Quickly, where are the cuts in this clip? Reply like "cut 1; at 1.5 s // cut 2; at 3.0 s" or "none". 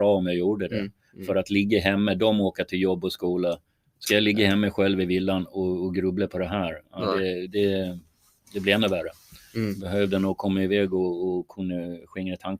none